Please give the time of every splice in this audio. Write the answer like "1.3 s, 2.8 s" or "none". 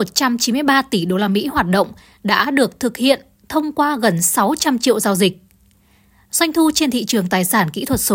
none